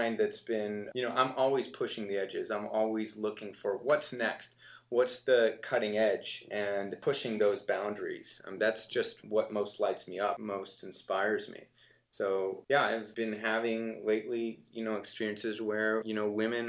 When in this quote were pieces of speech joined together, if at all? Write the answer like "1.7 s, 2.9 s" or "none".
0.9 s